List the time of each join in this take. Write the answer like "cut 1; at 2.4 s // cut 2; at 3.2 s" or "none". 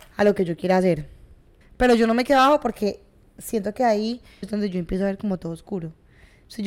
cut 1; at 1.6 s // cut 2; at 4.4 s